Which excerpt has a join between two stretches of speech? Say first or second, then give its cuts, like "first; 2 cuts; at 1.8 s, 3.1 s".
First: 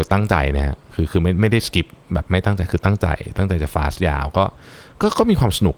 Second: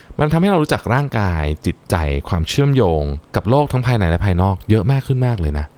second; 1 cut; at 3.3 s